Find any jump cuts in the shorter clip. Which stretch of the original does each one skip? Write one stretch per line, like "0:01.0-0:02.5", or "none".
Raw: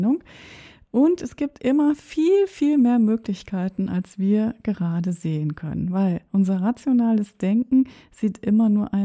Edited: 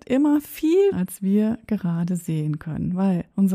0:02.5-0:03.9